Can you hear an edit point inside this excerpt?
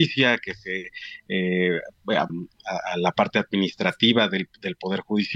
yes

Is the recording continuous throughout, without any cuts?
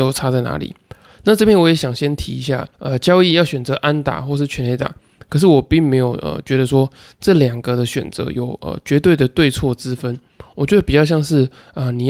no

